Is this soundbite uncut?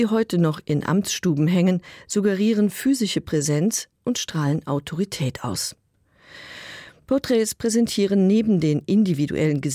yes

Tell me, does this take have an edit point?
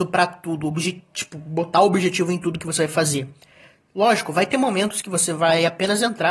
no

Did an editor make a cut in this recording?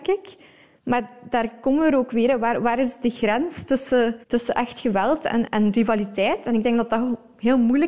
yes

